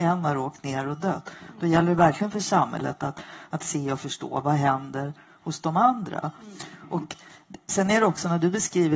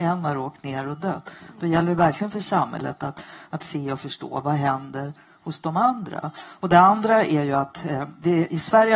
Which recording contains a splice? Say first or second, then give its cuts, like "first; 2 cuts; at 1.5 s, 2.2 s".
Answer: second; 1 cut; at 6.3 s